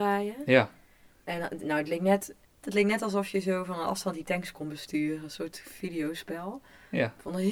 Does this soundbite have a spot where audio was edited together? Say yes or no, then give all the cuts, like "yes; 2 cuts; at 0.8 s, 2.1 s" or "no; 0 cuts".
yes; 1 cut; at 2.6 s